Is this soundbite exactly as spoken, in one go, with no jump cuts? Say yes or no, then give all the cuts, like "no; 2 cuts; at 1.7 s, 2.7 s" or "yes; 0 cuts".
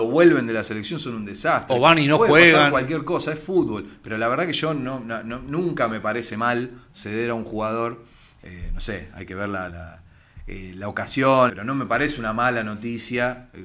no; 3 cuts; at 8.4 s, 9.7 s, 11.5 s